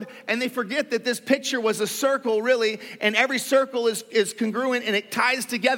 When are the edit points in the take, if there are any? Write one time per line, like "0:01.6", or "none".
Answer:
none